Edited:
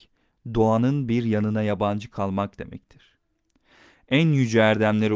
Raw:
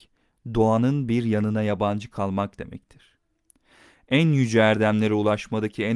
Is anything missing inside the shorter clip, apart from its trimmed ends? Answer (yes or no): no